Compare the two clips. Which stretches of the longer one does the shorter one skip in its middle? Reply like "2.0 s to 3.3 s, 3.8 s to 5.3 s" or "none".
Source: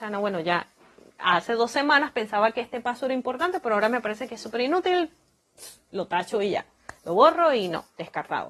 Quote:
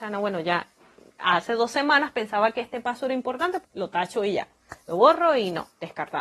3.6 s to 5.8 s

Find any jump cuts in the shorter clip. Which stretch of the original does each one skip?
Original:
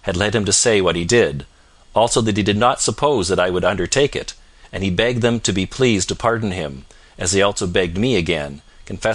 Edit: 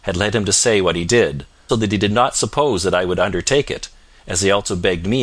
1.7 s to 2.1 s, 4.6 s to 7.1 s

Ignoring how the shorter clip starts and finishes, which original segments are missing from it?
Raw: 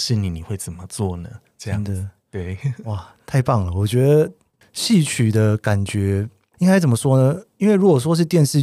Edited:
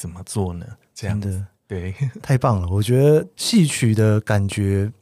2.8 s to 3.2 s, 4.4 s to 4.7 s

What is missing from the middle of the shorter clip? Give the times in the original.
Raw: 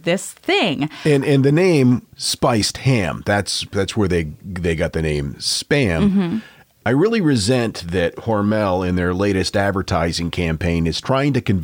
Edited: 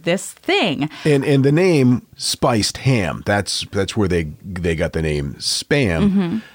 none

